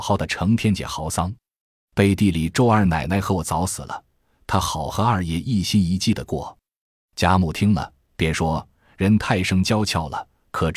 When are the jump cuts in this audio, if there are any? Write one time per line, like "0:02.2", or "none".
none